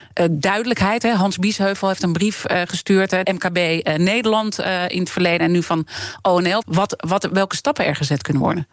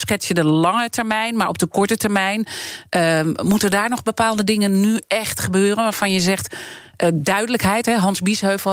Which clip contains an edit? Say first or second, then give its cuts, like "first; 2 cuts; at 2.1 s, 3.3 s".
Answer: first; 2 cuts; at 3.2 s, 6.6 s